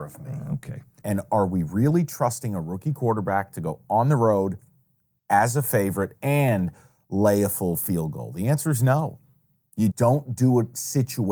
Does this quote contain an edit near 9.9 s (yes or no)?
yes